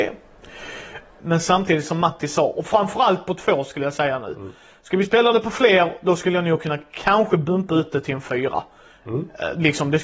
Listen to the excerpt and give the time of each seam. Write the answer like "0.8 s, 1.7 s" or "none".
1.2 s